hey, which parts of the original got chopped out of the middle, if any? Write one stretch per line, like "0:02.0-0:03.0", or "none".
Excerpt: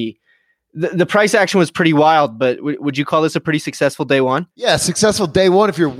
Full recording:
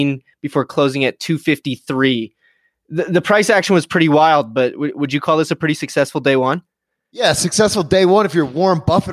0:06.7-0:07.1